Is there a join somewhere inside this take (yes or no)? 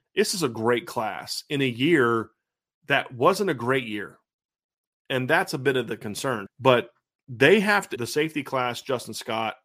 yes